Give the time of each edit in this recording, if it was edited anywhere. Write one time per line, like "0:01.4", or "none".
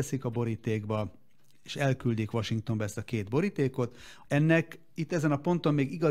0:04.2